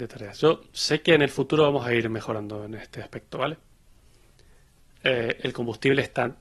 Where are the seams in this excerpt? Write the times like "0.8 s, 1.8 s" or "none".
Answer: none